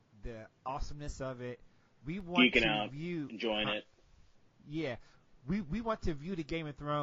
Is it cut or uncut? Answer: uncut